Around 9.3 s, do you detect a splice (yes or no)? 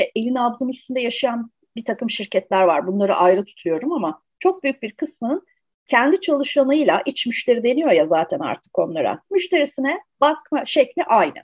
yes